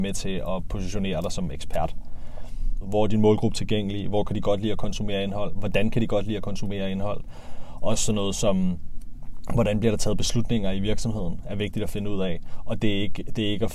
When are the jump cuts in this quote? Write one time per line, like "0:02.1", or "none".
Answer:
0:02.8